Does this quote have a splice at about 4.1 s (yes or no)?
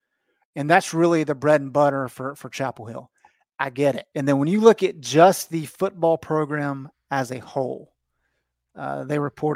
yes